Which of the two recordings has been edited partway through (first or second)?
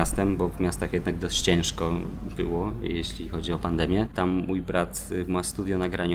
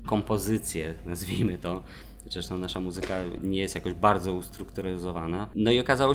first